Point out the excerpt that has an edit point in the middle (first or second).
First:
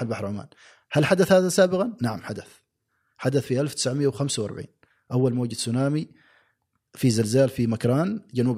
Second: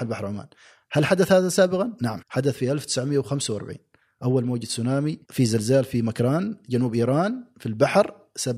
second